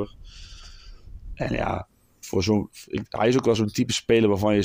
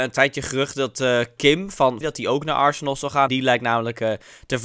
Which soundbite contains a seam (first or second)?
second